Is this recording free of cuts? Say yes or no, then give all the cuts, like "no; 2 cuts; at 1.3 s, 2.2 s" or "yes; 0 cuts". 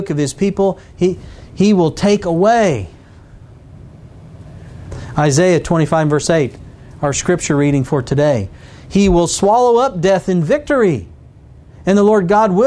yes; 0 cuts